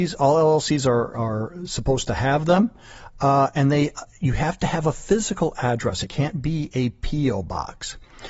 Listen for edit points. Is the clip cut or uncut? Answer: uncut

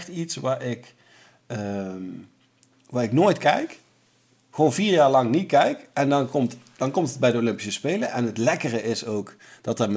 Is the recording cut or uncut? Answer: uncut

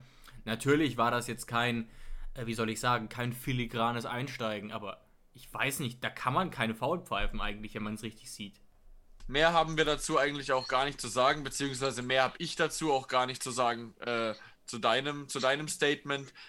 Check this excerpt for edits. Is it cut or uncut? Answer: cut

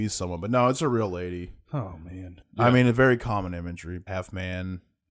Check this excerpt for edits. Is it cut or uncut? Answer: cut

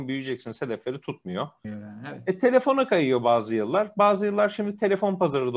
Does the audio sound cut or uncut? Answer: cut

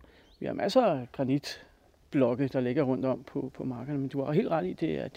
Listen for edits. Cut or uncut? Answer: uncut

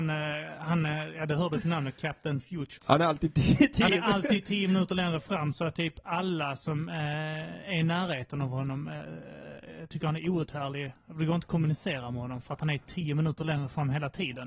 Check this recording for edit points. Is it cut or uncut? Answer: cut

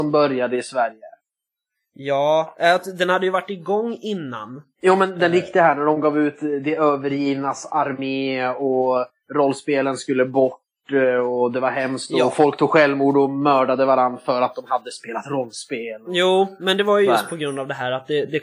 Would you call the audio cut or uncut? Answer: uncut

